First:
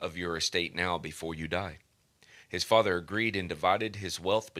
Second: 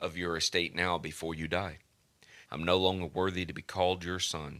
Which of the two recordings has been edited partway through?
second; 1 cut; at 2.4 s

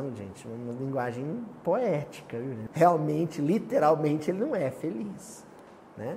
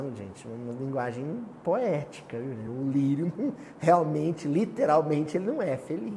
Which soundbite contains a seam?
first; 1 cut; at 2.7 s

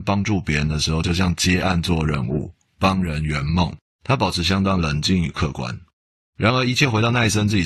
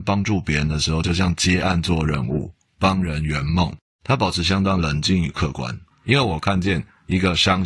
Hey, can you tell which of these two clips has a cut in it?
second; 1 cut; at 5.9 s

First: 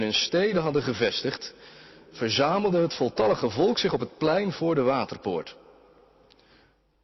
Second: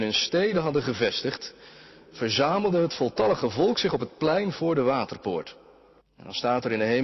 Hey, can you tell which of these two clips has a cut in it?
second; 1 cut; at 6.0 s

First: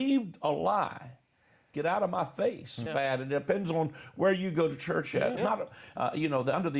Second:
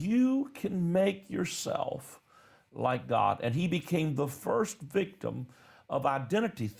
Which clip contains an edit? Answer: first; 3 cuts; at 1.7 s, 2.9 s, 5.4 s

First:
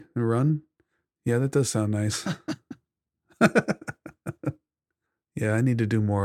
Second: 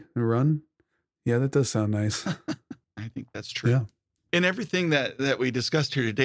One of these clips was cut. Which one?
second; 2 cuts; at 2.8 s, 4.3 s

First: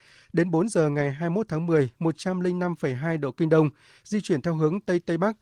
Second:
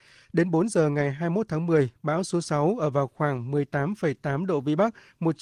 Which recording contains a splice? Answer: first; 1 cut; at 1.9 s

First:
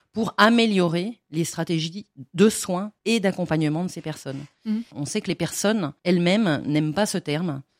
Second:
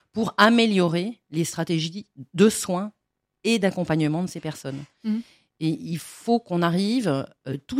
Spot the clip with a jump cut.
first; 3 cuts; at 3.0 s, 4.9 s, 6.0 s

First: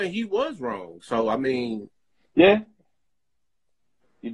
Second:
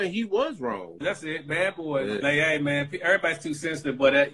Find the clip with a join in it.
second; 2 cuts; at 1.0 s, 2.2 s

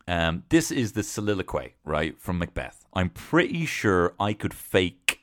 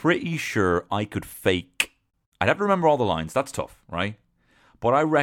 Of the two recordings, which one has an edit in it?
first; 1 cut; at 2.9 s

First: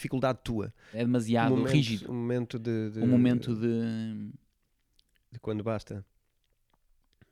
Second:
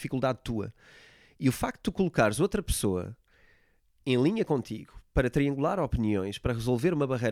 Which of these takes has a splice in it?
first; 1 cut; at 0.9 s

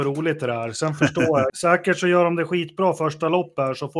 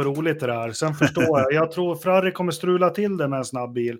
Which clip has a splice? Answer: first; 1 cut; at 1.5 s

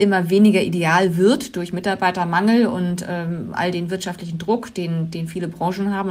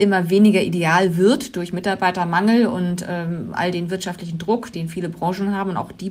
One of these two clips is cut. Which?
second; 1 cut; at 4.7 s

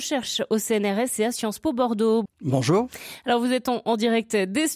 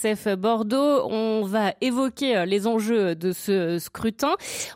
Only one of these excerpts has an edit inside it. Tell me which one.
first; 1 cut; at 2.3 s

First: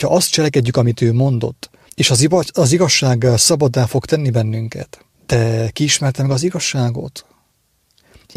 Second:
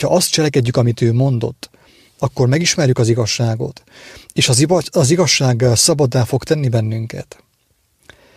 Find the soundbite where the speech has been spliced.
first; 2 cuts; at 1.9 s, 5.1 s

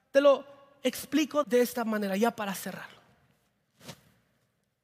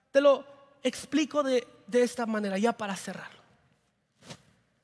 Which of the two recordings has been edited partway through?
first; 1 cut; at 1.4 s

